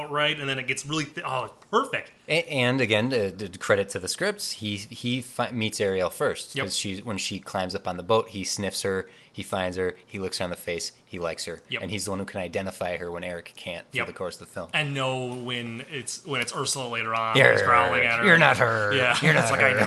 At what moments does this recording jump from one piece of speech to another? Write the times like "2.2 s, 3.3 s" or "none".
none